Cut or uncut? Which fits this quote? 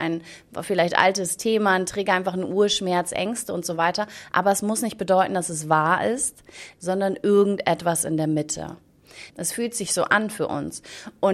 cut